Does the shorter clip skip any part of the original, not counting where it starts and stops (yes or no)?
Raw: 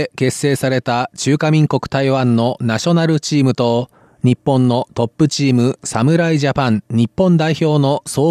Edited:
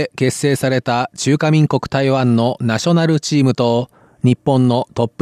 no